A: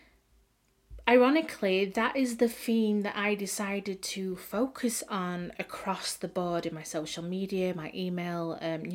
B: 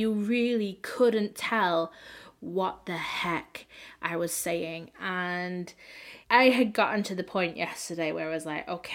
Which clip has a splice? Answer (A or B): B